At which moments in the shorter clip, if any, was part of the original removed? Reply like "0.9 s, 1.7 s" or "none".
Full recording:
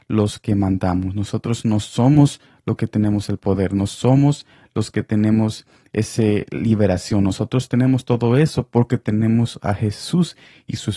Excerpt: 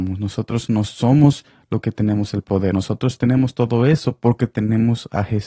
2.7 s